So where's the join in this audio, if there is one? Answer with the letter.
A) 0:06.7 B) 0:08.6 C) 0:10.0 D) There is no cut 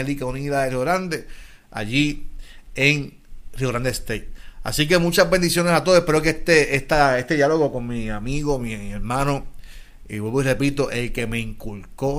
D